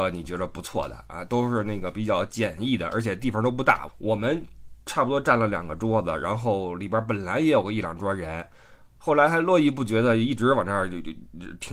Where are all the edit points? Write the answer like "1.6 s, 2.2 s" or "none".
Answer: 3.9 s